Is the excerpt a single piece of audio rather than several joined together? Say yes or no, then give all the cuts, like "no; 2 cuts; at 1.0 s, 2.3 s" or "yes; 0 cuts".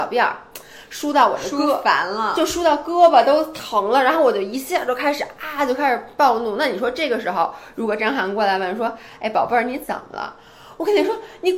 yes; 0 cuts